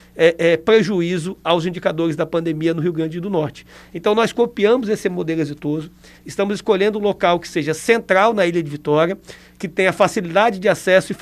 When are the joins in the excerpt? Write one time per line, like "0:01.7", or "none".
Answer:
0:06.1